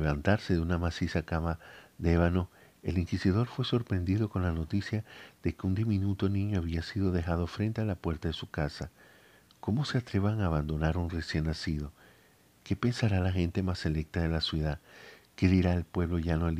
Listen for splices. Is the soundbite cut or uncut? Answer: uncut